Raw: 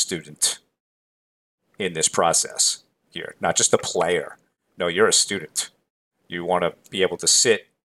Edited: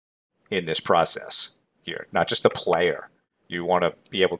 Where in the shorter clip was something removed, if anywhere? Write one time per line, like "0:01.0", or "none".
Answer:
0:03.4